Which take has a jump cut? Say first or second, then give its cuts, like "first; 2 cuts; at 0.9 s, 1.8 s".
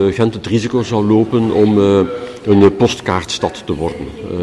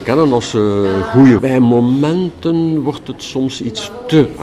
second; 1 cut; at 1.4 s